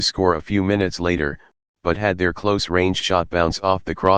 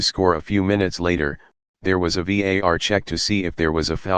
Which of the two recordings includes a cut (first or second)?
second